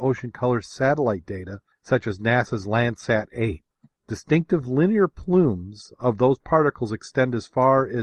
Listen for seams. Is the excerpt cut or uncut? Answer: uncut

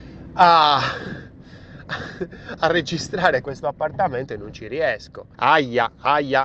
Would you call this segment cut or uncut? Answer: cut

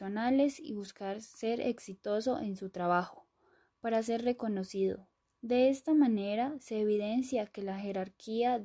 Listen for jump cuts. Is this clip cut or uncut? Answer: uncut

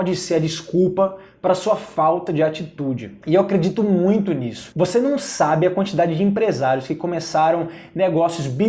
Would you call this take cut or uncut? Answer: uncut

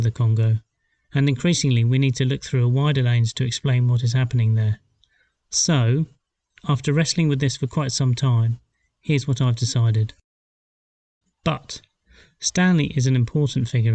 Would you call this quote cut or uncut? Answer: cut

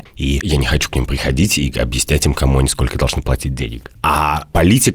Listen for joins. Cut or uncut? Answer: uncut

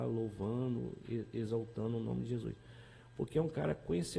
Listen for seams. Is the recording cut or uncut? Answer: cut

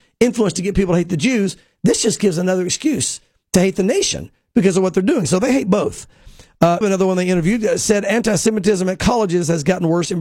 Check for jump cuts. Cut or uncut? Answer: cut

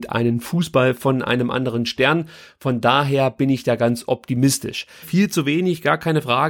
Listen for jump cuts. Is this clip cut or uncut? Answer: cut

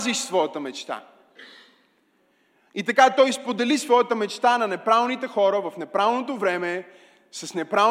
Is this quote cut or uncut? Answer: uncut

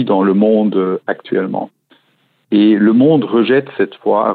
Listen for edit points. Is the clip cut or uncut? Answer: uncut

